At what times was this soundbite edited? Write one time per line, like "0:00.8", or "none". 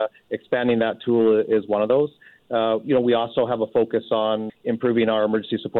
0:04.5